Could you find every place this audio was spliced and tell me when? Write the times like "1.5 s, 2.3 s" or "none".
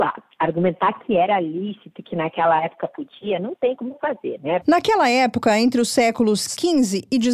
4.6 s